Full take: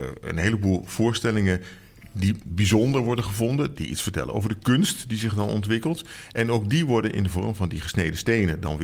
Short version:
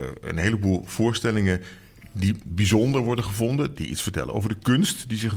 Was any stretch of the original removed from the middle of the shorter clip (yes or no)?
no